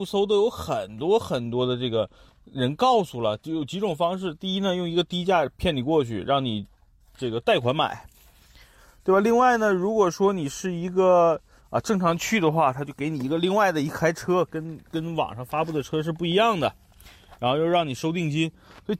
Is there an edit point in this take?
no; 0 cuts

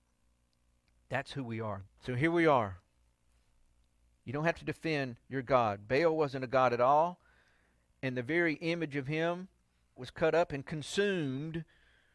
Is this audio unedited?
no; 2 cuts; at 1.9 s, 10.0 s

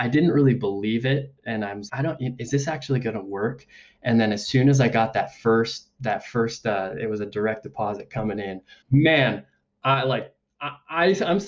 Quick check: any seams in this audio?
yes; 2 cuts; at 1.9 s, 8.8 s

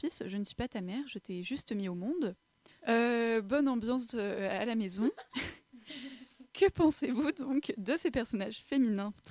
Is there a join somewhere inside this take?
yes; 1 cut; at 2.8 s

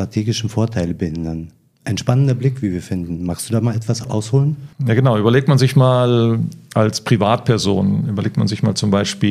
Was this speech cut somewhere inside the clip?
no; 0 cuts

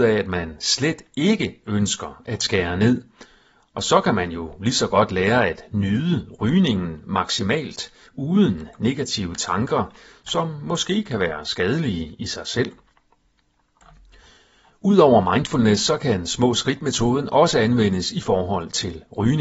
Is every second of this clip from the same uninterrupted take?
yes; 0 cuts

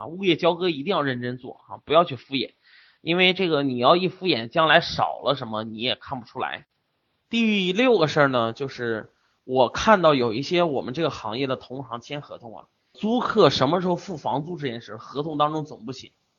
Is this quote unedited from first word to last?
yes; 0 cuts

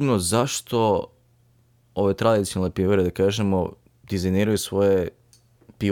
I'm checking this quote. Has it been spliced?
no; 0 cuts

